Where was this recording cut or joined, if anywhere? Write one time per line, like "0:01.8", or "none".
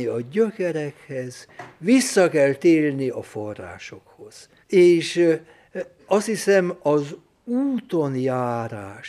0:04.6